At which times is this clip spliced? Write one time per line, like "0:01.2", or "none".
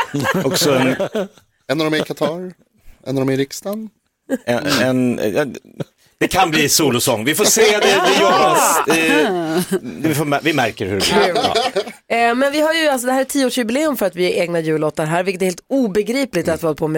none